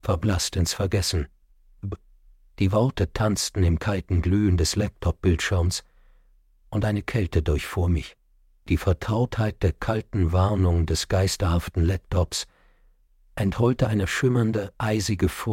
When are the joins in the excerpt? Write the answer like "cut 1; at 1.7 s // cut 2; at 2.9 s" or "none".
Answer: none